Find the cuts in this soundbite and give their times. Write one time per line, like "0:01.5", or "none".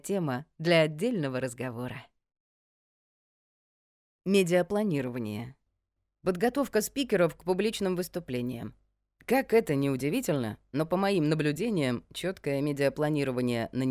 0:06.1
0:09.2